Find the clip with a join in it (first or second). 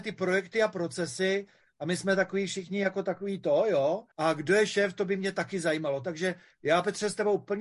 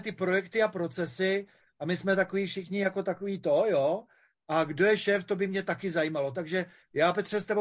first